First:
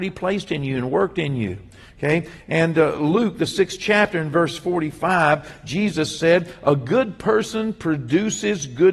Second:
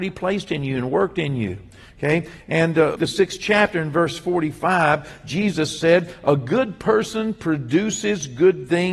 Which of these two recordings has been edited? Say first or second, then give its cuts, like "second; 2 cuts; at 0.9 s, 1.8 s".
second; 1 cut; at 3.0 s